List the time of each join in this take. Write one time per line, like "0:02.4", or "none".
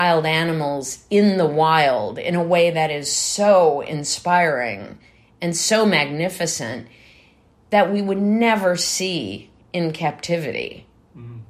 none